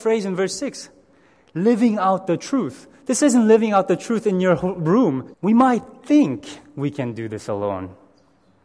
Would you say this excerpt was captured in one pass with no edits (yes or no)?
no